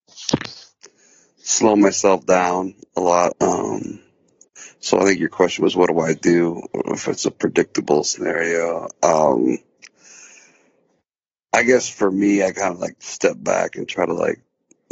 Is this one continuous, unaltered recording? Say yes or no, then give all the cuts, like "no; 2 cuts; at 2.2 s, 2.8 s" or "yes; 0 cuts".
no; 1 cut; at 3.3 s